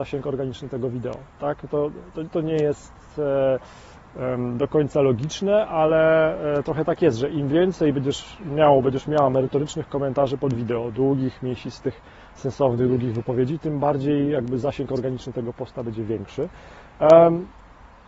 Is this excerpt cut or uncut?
cut